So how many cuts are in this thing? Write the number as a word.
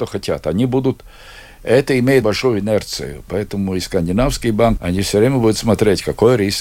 two